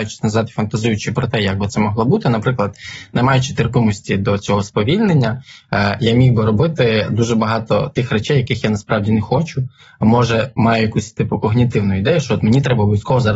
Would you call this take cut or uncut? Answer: uncut